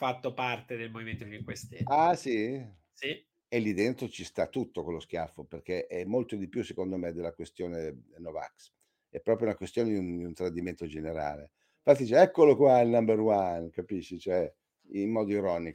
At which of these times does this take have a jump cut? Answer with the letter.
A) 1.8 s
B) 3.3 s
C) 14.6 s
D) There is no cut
B